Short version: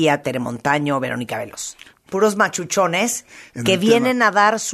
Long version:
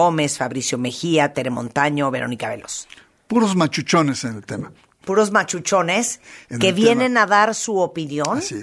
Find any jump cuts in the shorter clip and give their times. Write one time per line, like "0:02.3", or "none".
0:01.9